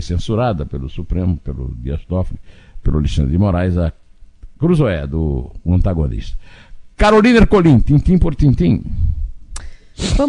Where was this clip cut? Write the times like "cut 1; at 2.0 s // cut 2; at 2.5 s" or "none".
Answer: none